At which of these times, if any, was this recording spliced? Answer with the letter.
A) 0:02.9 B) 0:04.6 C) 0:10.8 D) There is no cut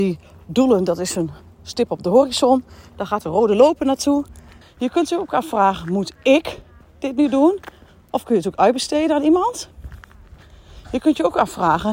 B